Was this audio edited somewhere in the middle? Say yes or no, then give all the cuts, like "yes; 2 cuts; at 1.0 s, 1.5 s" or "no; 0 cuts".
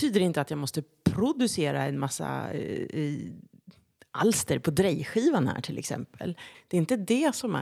yes; 1 cut; at 6.5 s